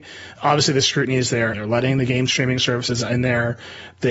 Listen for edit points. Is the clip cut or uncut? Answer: cut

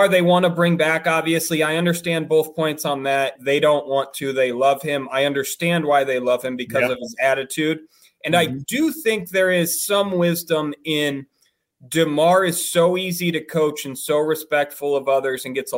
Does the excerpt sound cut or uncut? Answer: cut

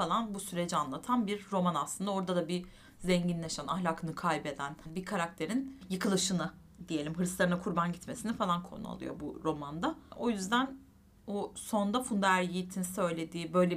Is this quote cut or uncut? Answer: uncut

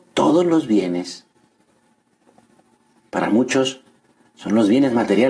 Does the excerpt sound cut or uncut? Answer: uncut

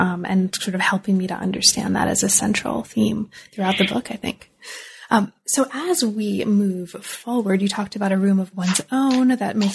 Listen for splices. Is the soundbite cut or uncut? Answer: uncut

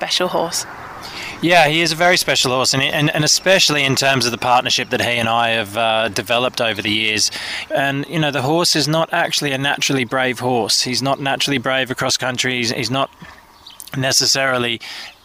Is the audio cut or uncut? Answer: cut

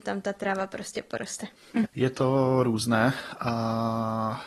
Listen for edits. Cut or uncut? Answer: cut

